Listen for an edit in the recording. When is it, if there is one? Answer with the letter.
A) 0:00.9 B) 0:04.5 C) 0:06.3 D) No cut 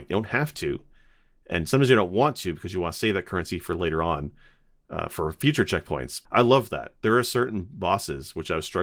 C